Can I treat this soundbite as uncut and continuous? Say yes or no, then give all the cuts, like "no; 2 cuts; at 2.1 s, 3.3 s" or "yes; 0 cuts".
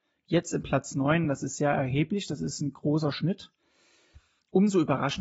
yes; 0 cuts